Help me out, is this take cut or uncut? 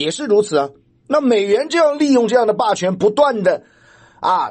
uncut